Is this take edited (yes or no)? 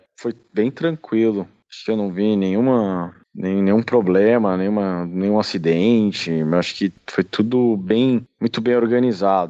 no